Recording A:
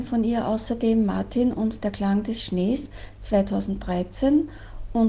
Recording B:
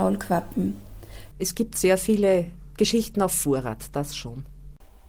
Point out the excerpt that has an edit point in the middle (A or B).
B